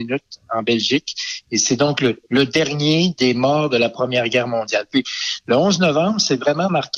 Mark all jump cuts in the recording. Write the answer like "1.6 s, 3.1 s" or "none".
none